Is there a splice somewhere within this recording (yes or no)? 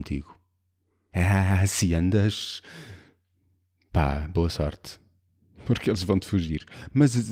yes